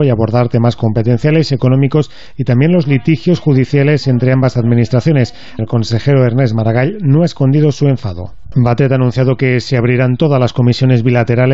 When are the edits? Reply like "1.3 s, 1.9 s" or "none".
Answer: 5.6 s, 8.5 s